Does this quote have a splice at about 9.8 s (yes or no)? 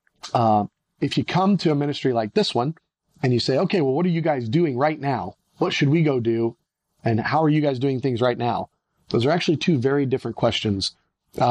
no